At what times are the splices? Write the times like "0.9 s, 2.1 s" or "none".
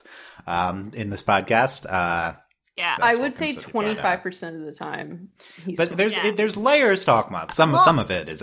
3.0 s, 5.9 s, 7.5 s